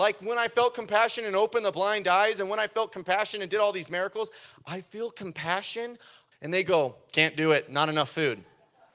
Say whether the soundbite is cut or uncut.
cut